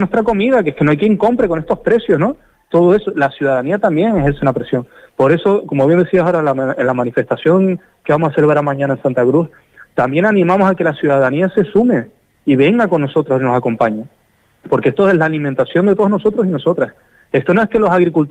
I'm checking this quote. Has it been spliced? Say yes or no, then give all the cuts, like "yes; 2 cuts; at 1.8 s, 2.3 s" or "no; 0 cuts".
no; 0 cuts